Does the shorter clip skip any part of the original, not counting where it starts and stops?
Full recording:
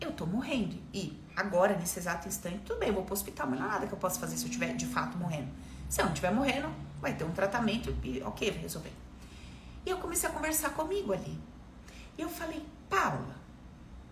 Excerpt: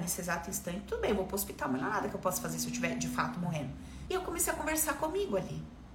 yes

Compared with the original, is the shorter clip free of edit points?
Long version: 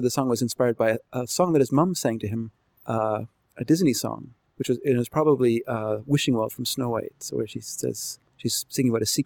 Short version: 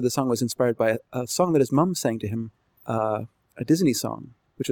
yes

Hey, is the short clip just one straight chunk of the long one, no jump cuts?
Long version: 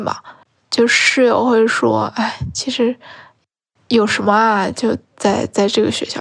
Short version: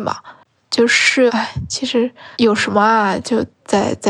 no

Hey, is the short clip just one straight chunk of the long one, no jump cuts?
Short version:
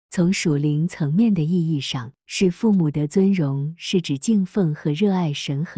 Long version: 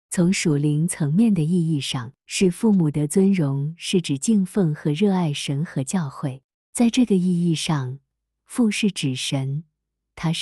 yes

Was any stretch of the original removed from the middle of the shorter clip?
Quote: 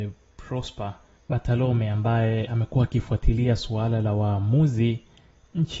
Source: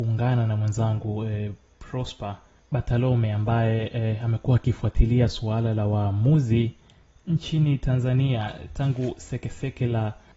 yes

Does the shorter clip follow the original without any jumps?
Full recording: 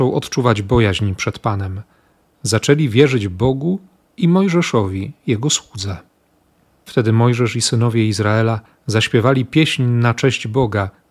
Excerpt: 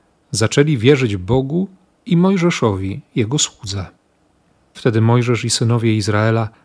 yes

